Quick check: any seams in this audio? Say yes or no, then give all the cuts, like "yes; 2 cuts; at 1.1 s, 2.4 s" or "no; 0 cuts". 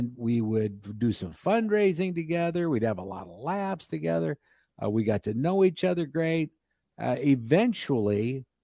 no; 0 cuts